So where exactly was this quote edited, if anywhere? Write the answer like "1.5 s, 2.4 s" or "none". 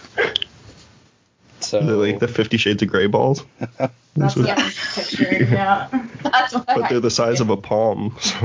none